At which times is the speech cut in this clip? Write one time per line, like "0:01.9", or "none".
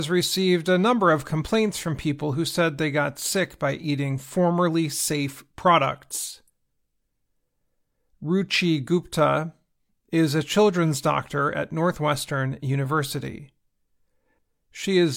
none